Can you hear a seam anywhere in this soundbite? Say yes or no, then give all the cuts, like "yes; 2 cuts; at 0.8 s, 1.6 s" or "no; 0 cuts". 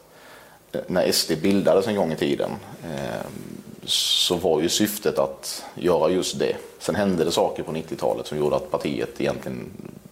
no; 0 cuts